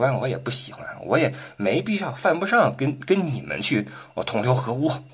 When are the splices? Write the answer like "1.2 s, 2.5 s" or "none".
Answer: none